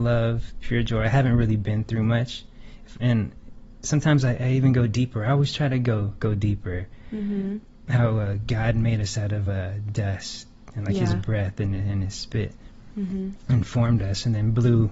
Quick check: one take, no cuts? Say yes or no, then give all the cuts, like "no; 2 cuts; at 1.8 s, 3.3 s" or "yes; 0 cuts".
yes; 0 cuts